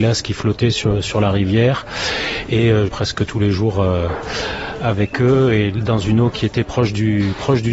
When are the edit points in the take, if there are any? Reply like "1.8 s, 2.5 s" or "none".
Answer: 2.9 s